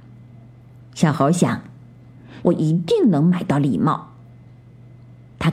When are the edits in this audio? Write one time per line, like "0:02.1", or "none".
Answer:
0:02.4